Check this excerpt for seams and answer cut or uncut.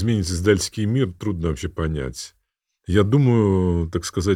uncut